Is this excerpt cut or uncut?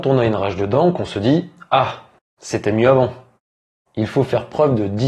cut